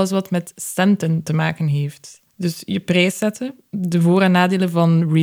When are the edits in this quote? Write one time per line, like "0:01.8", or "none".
0:02.3